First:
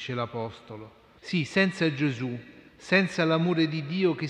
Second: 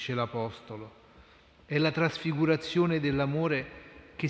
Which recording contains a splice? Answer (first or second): first